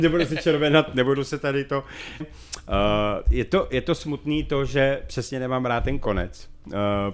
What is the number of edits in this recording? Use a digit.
1